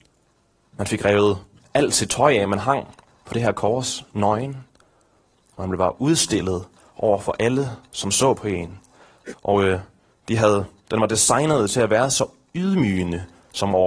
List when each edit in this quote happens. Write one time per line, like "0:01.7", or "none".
0:09.3